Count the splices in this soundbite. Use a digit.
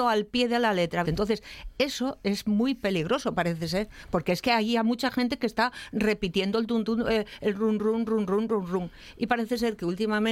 1